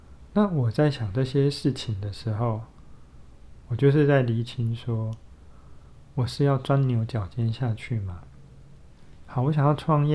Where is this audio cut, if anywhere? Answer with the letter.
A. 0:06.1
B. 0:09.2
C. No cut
B